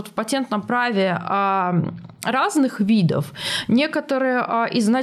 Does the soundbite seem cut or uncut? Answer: uncut